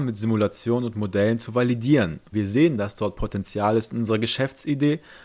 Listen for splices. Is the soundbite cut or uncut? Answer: cut